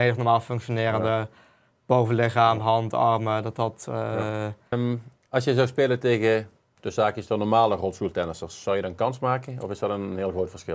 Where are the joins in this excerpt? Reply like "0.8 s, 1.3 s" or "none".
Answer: 4.7 s